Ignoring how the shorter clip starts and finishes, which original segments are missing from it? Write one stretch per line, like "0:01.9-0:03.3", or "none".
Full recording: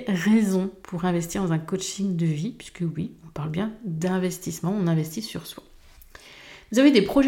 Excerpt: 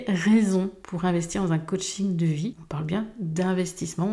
0:02.5-0:03.2